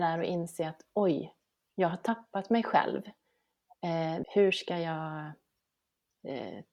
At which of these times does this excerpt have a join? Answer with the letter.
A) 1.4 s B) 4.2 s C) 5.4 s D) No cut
B